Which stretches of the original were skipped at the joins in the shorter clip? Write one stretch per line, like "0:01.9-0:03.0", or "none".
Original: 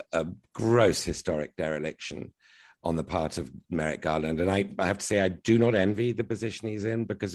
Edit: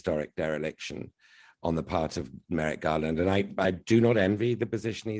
0:04.8-0:05.2